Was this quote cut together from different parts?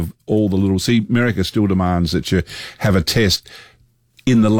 no; 0 cuts

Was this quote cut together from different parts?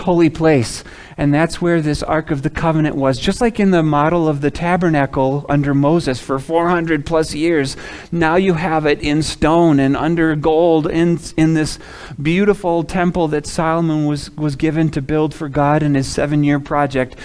no; 0 cuts

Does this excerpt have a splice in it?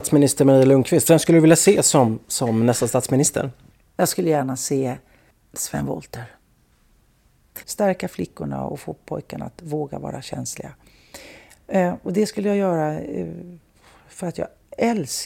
yes; 1 cut; at 7.6 s

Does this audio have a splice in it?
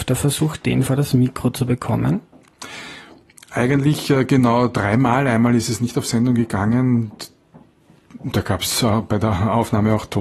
no; 0 cuts

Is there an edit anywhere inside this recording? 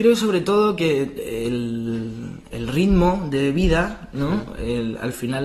yes; 1 cut; at 2.5 s

